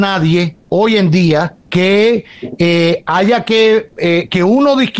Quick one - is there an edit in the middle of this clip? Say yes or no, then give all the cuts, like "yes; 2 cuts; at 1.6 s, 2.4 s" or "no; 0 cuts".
yes; 1 cut; at 1.6 s